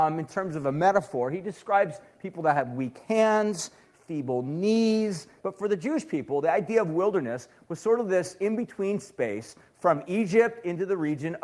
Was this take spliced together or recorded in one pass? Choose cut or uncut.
cut